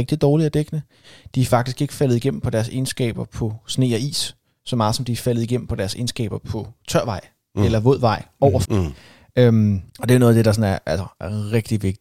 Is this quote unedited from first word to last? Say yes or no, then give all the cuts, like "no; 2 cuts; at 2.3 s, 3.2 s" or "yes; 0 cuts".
no; 2 cuts; at 8.6 s, 9.9 s